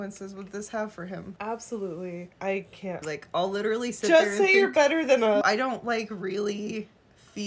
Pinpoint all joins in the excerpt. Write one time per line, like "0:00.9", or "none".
0:03.0
0:05.4